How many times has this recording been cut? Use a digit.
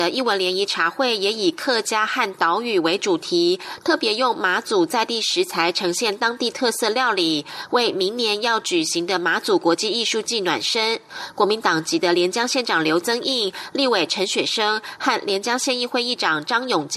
0